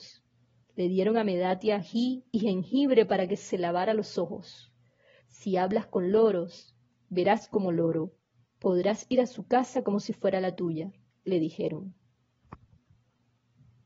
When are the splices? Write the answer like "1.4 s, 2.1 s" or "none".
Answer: 5.2 s